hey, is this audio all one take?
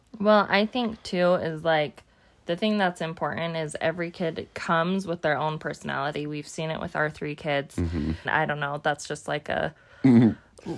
no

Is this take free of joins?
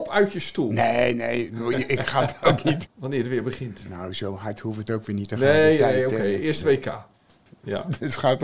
no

